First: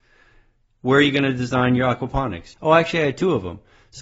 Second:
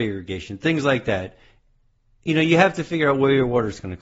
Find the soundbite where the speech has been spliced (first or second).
first